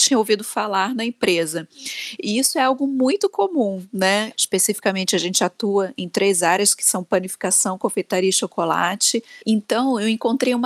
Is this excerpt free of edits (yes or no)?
no